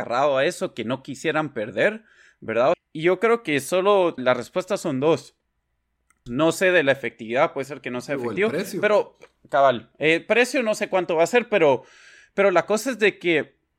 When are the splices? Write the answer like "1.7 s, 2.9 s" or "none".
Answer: 2.7 s, 4.2 s, 6.3 s